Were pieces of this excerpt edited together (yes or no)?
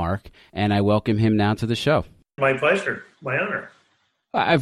yes